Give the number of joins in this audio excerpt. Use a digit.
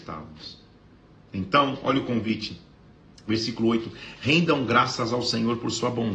0